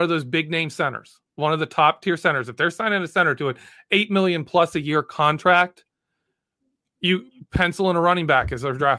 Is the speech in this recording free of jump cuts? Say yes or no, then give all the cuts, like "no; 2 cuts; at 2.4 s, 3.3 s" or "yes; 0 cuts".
yes; 0 cuts